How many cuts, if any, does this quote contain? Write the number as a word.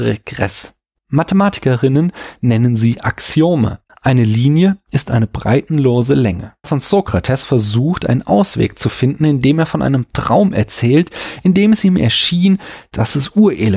three